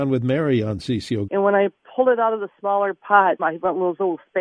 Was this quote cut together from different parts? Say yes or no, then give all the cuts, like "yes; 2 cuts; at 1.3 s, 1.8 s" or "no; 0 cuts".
yes; 2 cuts; at 1.3 s, 3.4 s